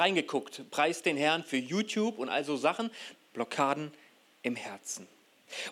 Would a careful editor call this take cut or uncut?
cut